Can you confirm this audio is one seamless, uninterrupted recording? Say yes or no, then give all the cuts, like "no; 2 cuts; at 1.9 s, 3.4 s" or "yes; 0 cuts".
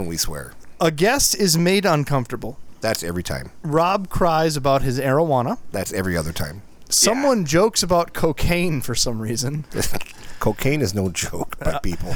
yes; 0 cuts